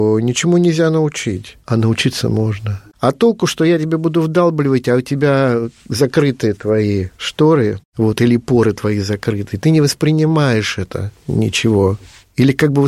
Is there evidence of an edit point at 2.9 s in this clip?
yes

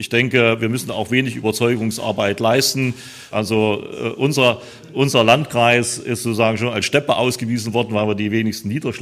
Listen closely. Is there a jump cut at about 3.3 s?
yes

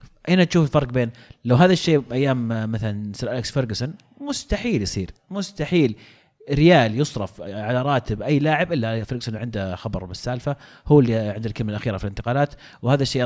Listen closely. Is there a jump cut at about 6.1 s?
no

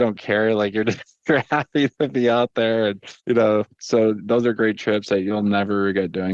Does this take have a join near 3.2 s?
yes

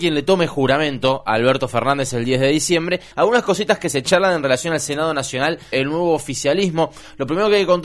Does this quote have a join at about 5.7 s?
yes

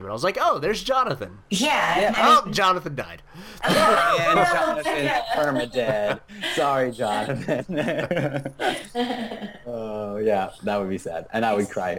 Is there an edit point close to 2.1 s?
yes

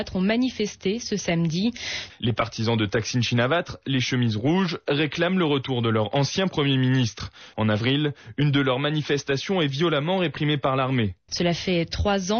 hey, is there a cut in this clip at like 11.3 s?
yes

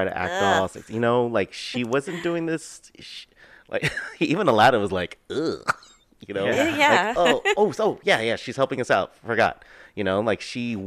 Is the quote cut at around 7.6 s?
yes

